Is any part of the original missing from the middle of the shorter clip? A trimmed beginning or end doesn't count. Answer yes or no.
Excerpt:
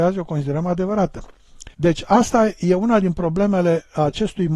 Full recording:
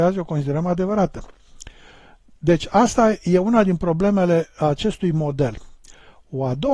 yes